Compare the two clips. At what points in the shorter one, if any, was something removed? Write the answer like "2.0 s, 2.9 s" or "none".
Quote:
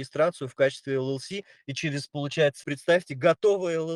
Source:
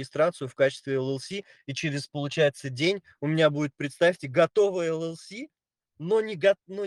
2.6 s